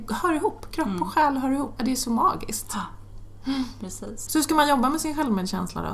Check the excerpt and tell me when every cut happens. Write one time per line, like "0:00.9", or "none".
0:01.8
0:04.3